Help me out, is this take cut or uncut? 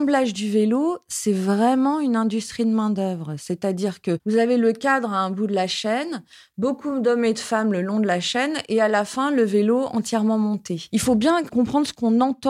uncut